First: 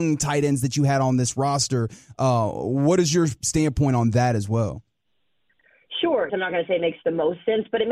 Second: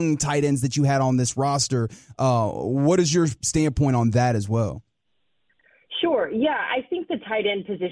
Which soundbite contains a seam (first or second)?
first